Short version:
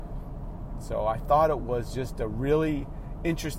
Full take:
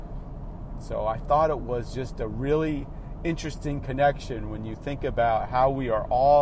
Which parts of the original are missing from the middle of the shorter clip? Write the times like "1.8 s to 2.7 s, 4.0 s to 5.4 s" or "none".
none

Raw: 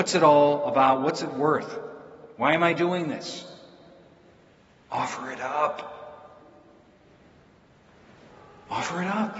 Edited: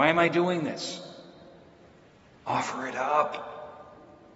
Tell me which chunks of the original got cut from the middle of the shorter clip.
none

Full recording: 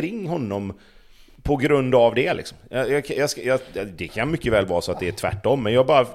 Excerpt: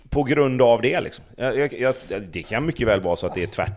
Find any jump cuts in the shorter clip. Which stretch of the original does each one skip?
3.0 s to 3.3 s

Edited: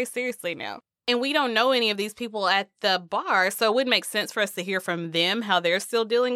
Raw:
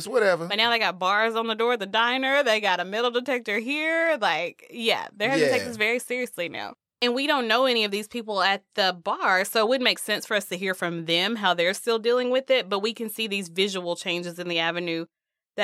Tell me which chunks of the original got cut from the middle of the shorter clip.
none

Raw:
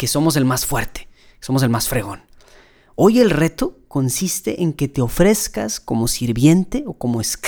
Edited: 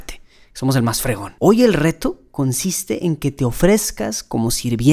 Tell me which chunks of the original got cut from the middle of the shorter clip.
2.2 s to 2.9 s

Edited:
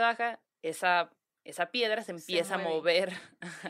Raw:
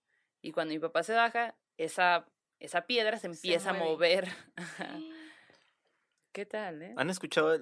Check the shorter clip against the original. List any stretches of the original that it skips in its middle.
none

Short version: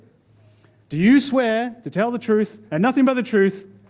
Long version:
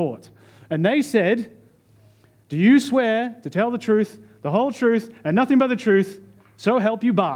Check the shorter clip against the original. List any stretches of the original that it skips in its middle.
4.3 s to 5.2 s

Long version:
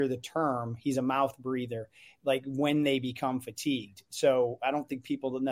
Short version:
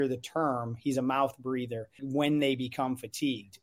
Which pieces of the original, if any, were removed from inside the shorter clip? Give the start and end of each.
2.0 s to 2.4 s

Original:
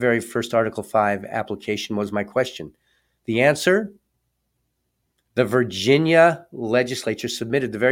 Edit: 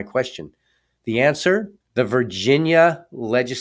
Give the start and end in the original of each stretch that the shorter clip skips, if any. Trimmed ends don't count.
4.0 s to 5.2 s

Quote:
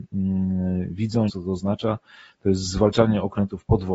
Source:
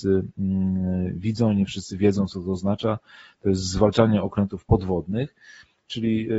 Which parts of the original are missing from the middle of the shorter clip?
1.5 s to 2.3 s

